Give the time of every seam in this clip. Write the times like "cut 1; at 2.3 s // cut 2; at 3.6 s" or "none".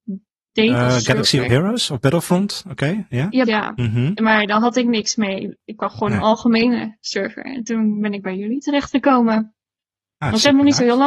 cut 1; at 3.5 s